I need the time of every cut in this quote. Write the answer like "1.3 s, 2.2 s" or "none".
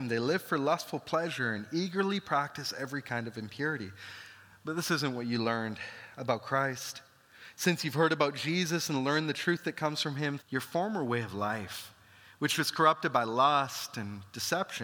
10.4 s

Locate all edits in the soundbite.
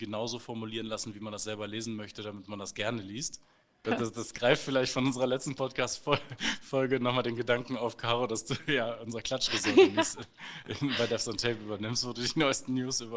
3.8 s

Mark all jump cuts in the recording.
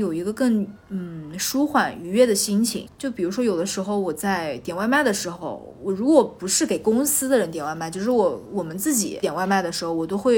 2.9 s

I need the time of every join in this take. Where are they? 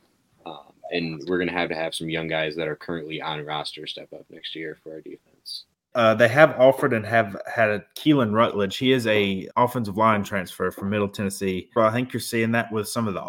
5.9 s, 9.5 s, 11.8 s

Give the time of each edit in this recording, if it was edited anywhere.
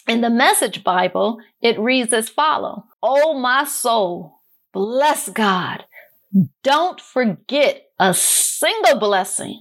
2.9 s

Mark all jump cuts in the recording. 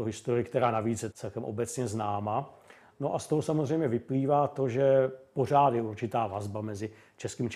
1.1 s

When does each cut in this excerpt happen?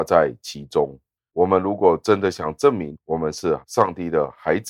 1.3 s

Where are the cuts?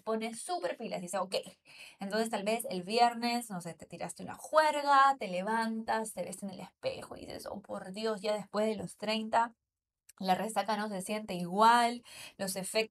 none

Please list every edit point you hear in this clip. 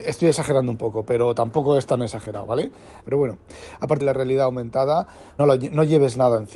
3.0 s, 4.0 s, 5.4 s

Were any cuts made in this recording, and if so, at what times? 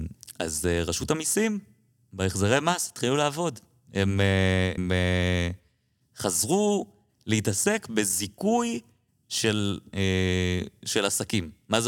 4.8 s

